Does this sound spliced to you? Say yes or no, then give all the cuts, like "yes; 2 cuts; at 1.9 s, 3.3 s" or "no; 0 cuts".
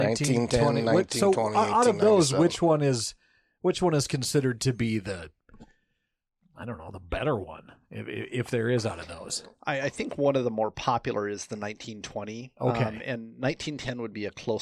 no; 0 cuts